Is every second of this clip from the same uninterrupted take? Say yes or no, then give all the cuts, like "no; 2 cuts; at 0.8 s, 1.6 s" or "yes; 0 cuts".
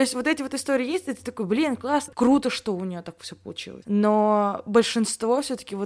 no; 1 cut; at 2.1 s